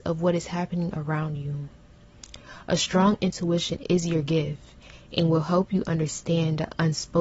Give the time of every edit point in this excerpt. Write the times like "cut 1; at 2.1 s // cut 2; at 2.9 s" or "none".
none